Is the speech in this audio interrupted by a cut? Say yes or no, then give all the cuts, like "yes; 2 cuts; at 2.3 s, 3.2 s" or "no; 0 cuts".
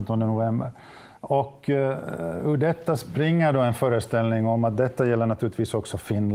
no; 0 cuts